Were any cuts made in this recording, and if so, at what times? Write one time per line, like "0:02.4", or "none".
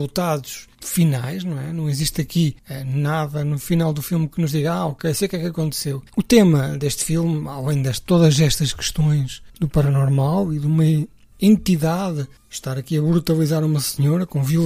0:06.1
0:12.4